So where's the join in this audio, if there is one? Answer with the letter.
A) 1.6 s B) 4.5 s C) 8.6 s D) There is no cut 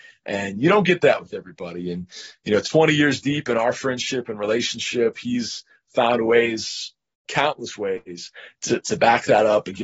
D